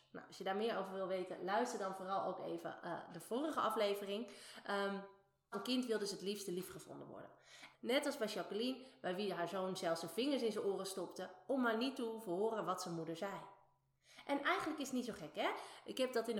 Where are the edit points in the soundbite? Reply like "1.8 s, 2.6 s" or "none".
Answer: 5.5 s, 7.7 s